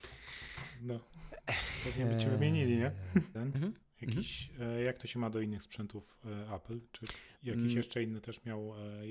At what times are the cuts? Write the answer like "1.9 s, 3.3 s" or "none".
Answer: 3.3 s